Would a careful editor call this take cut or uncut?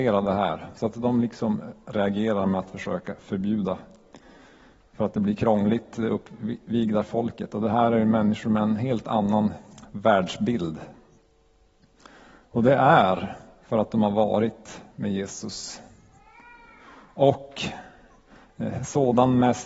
uncut